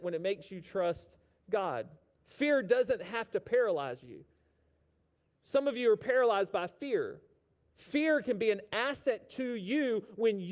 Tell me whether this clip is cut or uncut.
cut